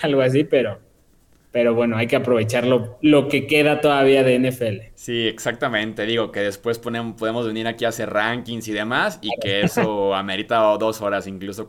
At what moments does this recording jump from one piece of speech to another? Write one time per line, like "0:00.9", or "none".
none